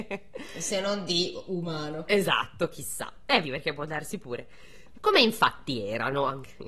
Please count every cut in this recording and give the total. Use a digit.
2